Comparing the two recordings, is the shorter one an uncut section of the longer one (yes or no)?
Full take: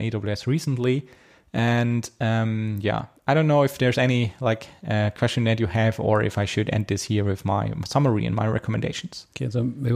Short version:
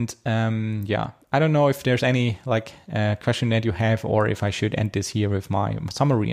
yes